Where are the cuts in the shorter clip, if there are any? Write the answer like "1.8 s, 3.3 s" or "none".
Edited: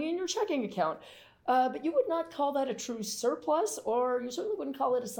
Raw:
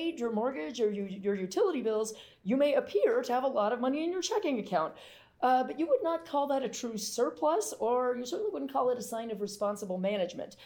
none